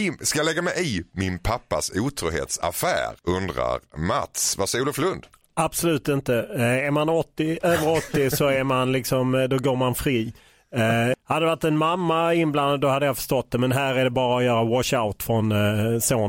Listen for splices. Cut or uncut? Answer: cut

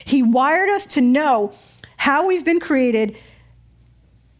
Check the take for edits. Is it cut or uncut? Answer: uncut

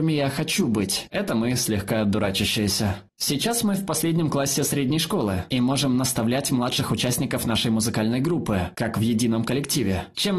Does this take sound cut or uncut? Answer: cut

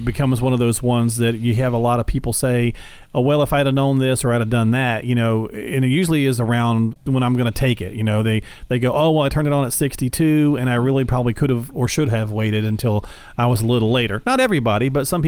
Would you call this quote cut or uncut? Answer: uncut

